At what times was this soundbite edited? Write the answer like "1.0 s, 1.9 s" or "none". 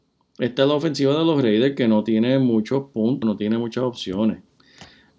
3.2 s